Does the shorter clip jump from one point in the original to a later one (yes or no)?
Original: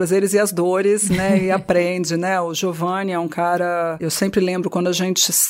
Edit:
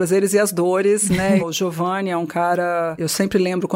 yes